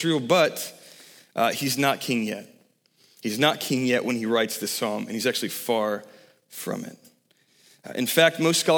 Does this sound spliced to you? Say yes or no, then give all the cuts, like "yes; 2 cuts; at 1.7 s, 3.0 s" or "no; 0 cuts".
no; 0 cuts